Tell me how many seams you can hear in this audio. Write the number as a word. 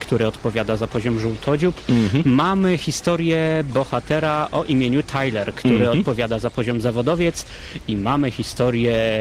zero